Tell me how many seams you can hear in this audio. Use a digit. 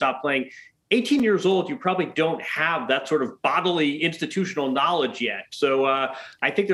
0